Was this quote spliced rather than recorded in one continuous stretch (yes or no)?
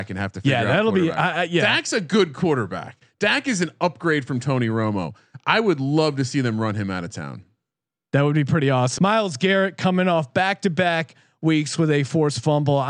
yes